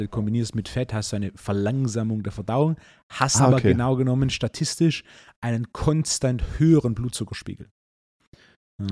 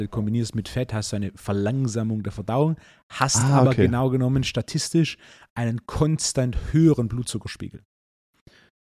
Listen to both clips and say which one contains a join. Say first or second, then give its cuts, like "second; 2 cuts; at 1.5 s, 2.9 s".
first; 1 cut; at 3.4 s